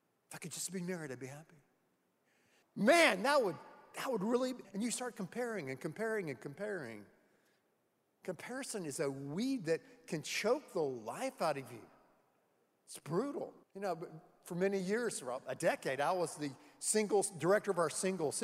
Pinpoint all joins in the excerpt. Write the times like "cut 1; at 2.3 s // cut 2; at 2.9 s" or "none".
cut 1; at 2.6 s // cut 2; at 4.6 s // cut 3; at 13.6 s